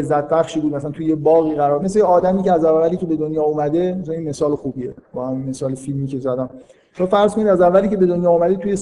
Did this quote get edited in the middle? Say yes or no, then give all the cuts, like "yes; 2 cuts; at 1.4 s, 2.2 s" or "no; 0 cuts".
yes; 1 cut; at 1.8 s